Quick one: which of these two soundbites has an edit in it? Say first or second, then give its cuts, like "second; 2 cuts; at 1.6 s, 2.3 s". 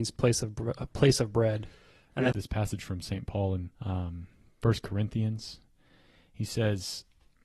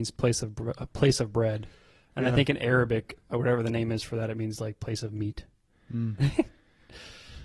first; 2 cuts; at 2.3 s, 3.8 s